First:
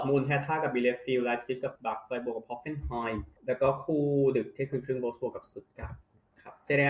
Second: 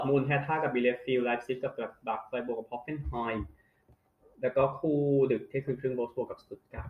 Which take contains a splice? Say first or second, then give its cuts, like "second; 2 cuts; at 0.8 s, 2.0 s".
first; 2 cuts; at 1.8 s, 3.4 s